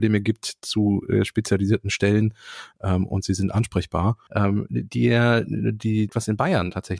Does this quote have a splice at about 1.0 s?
no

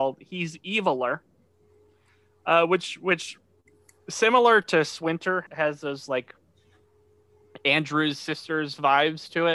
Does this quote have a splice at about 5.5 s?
yes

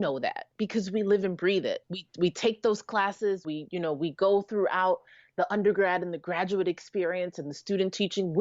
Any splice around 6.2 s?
no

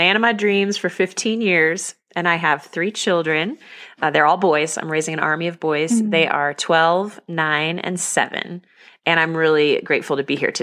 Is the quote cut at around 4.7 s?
no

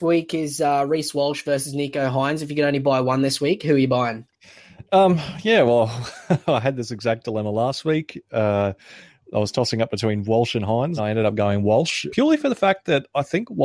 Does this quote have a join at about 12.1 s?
yes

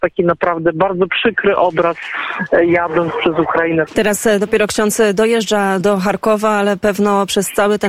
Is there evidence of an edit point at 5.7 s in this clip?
no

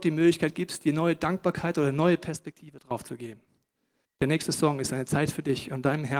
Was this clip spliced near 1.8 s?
no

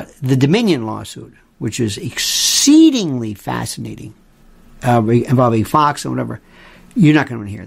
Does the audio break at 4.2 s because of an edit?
no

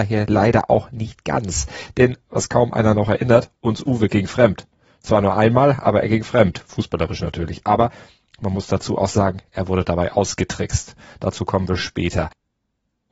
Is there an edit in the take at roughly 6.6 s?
no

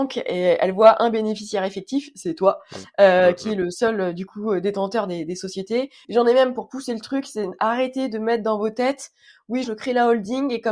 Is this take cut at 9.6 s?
yes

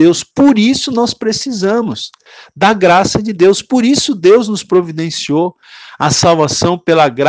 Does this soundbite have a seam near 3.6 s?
no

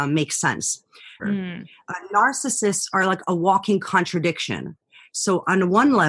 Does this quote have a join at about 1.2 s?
yes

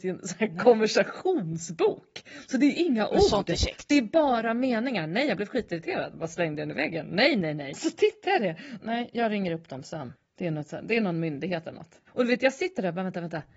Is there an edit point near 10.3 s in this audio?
no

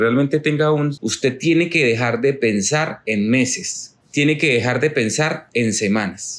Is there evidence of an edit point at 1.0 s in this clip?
yes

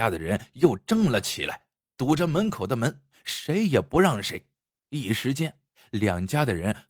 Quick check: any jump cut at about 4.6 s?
no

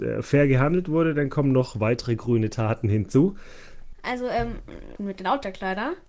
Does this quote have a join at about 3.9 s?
yes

